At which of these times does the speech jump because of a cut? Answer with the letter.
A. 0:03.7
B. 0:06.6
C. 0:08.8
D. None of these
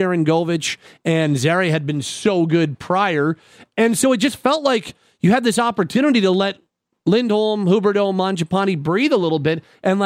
D